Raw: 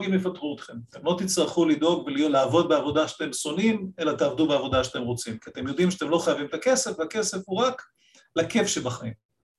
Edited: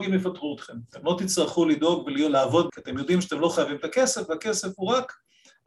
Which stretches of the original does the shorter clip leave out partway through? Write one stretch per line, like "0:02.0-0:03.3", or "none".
0:02.7-0:05.4